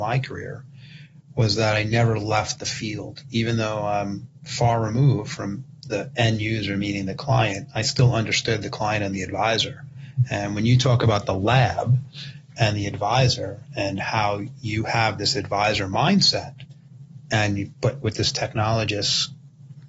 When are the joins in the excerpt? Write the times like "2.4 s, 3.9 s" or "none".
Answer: none